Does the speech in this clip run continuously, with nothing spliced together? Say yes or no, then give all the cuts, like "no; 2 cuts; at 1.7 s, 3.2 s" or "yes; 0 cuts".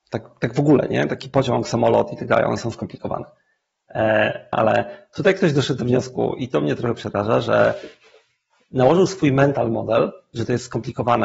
no; 1 cut; at 4.5 s